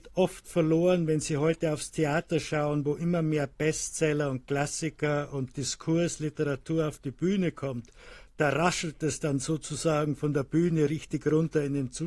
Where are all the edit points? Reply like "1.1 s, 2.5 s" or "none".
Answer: none